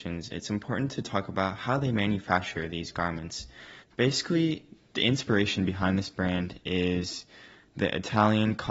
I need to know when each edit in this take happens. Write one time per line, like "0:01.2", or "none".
0:03.8